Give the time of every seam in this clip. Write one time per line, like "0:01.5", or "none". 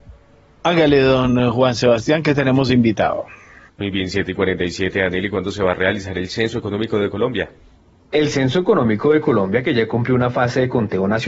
0:03.7